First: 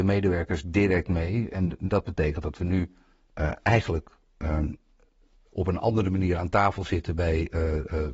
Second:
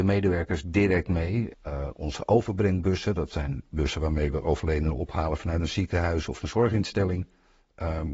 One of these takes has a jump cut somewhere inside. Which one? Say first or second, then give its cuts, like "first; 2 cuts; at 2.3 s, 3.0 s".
second; 1 cut; at 1.5 s